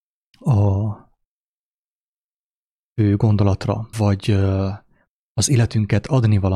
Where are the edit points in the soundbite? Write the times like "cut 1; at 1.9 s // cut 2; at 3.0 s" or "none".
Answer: cut 1; at 3.9 s